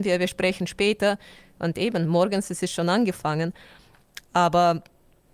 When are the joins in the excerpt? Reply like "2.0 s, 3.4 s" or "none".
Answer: none